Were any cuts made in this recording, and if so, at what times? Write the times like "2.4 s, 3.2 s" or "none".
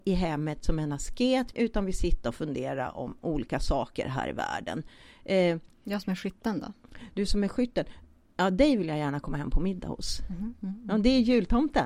1.5 s